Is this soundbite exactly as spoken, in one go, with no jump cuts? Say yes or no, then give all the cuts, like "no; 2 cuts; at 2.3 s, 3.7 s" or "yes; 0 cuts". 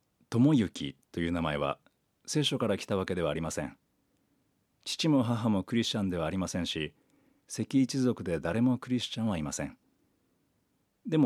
yes; 0 cuts